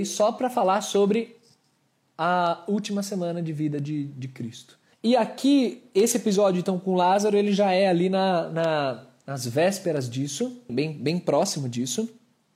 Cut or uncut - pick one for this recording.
cut